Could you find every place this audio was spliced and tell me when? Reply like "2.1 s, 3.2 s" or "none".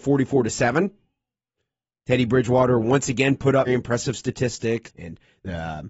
3.7 s, 4.8 s